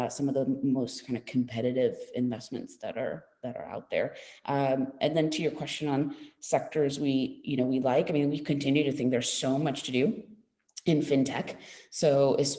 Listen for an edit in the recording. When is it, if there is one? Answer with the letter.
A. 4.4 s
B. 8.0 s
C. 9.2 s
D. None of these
D